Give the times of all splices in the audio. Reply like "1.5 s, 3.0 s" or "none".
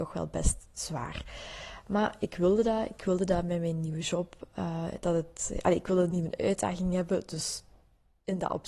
none